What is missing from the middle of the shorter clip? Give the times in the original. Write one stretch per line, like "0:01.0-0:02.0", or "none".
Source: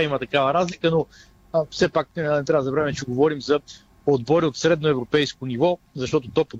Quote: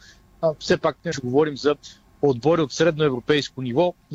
0:02.2-0:03.0